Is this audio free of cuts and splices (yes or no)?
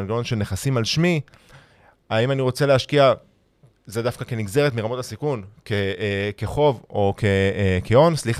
yes